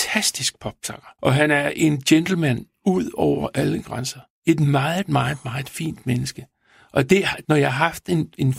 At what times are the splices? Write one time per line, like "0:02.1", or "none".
0:01.2
0:07.4